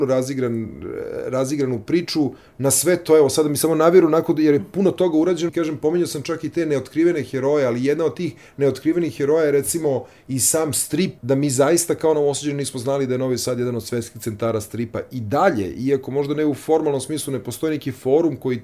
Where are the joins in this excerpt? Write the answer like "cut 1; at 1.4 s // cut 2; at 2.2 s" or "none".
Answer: cut 1; at 5.5 s // cut 2; at 11.2 s